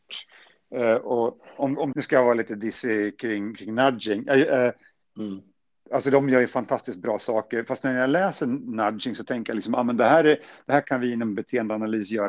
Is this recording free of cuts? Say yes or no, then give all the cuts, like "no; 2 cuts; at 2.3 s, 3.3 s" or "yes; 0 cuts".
no; 1 cut; at 1.9 s